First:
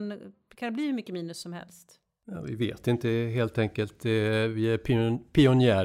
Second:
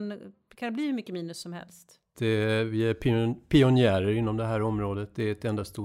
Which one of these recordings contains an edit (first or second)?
second